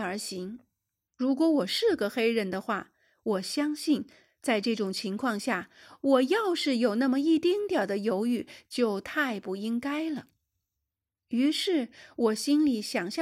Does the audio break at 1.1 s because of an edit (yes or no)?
yes